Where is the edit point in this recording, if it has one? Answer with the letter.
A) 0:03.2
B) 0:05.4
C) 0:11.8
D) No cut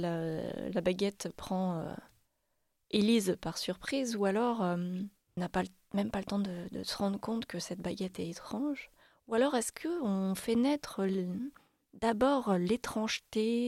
B